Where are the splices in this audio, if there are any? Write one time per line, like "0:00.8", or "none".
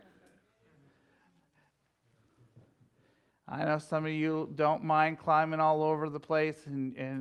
none